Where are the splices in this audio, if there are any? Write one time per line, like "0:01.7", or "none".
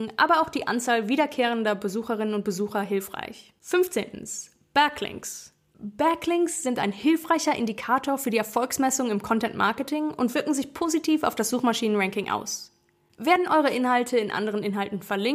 none